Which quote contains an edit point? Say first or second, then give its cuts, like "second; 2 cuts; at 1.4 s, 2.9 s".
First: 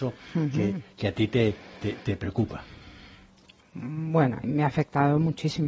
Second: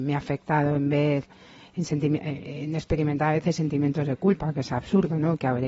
first; 1 cut; at 4.4 s